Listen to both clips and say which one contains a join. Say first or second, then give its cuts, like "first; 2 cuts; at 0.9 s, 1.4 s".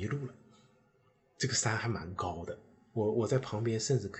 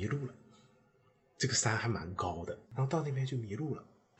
second; 1 cut; at 2.6 s